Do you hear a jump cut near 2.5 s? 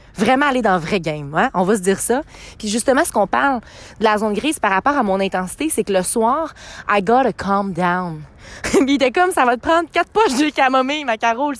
yes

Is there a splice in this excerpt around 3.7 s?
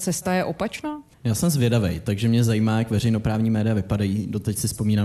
no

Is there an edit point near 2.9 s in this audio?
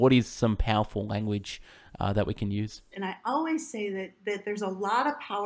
yes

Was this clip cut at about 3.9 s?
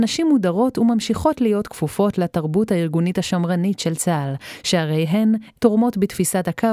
no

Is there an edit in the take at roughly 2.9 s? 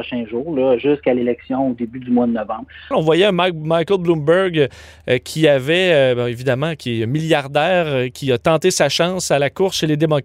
yes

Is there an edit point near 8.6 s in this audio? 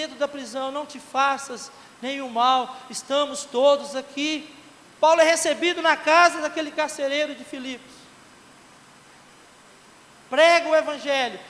no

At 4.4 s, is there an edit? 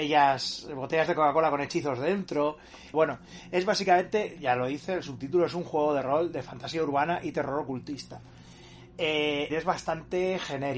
no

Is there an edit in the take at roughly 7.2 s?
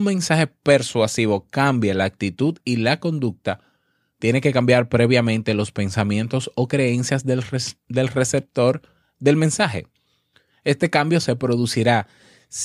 no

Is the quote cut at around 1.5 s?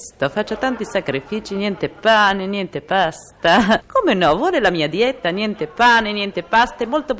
no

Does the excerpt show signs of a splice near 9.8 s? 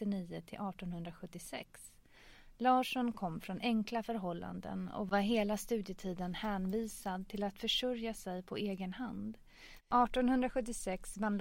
yes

